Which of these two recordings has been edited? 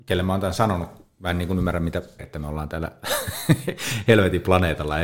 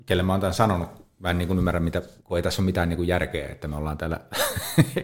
first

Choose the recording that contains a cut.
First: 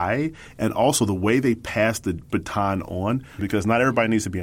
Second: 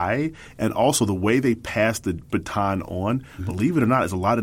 first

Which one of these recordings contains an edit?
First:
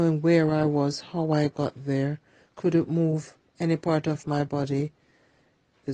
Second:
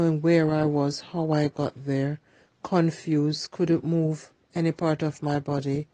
first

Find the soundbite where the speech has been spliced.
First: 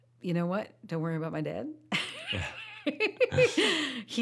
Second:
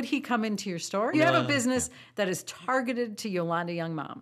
second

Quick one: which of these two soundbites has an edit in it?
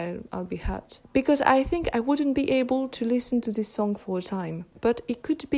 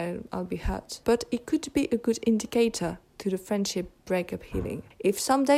second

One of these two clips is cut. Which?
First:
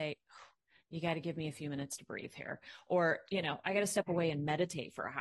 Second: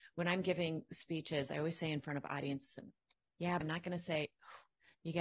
second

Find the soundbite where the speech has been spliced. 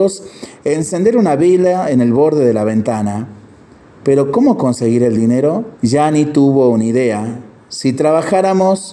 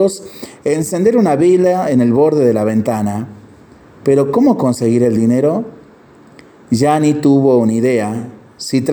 first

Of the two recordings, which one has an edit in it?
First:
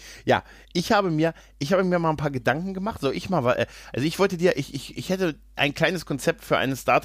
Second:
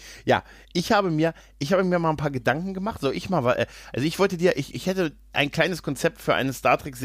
second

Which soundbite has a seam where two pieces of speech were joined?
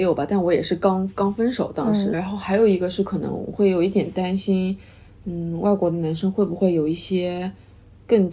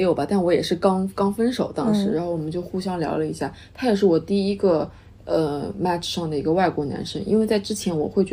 first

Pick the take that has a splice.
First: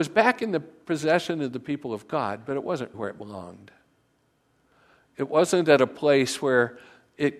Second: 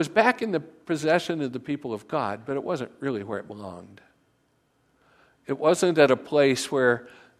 first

